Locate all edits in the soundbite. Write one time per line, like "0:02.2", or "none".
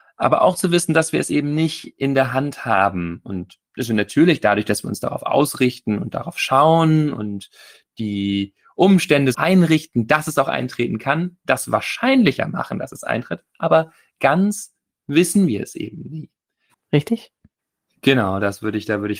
0:09.3
0:16.7